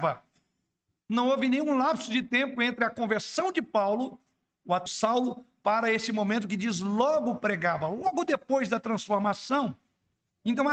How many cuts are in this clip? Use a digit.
1